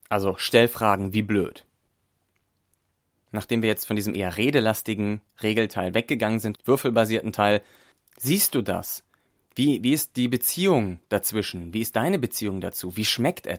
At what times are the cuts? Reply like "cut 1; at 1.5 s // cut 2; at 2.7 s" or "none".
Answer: cut 1; at 6.6 s // cut 2; at 8.1 s